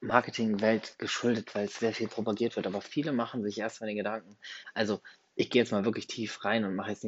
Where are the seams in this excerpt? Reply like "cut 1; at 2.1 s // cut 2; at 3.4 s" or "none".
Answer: cut 1; at 1.7 s